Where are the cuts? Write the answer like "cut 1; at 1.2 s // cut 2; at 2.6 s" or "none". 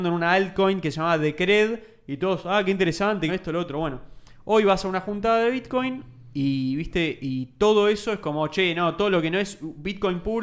cut 1; at 3.3 s

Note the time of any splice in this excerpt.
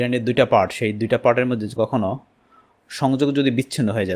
cut 1; at 1.8 s

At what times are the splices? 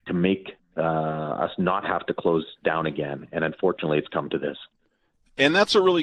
none

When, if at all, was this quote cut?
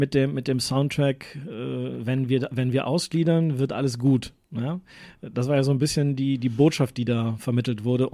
none

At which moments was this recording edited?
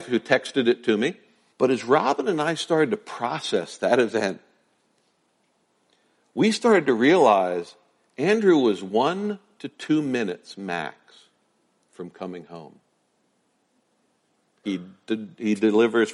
cut 1; at 1.5 s // cut 2; at 14.6 s

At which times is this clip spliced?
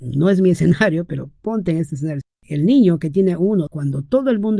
cut 1; at 2.2 s // cut 2; at 3.7 s

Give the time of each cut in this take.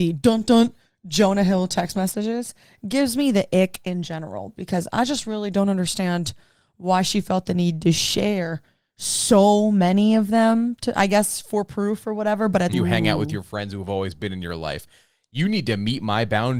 cut 1; at 12.7 s

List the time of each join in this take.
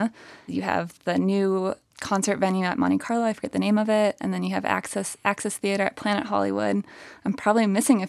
none

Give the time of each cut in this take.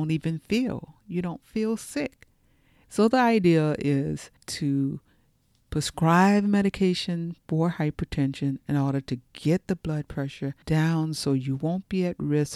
cut 1; at 2.8 s // cut 2; at 4.4 s // cut 3; at 10.6 s

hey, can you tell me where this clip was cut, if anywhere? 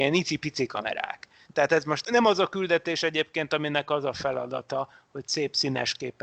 cut 1; at 1.4 s

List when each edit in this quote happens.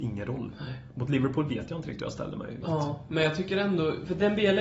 cut 1; at 2.6 s

